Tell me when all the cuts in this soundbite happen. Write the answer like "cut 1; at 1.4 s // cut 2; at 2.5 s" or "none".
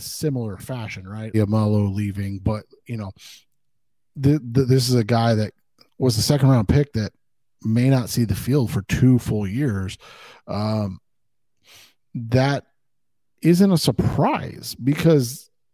cut 1; at 1.3 s